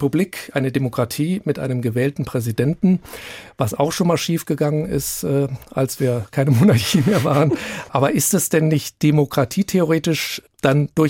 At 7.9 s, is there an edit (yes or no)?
yes